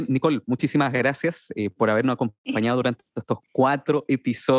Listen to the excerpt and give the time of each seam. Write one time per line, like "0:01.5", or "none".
none